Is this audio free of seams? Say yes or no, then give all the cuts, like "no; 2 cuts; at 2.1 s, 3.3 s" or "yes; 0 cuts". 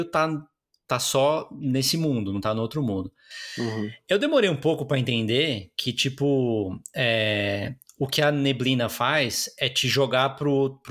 yes; 0 cuts